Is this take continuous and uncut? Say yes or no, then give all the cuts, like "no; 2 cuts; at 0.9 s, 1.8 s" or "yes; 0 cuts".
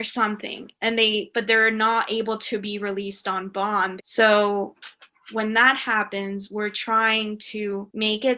no; 2 cuts; at 1.3 s, 4.0 s